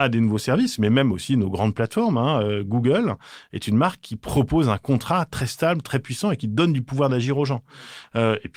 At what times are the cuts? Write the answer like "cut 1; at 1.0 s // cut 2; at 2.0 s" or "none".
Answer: none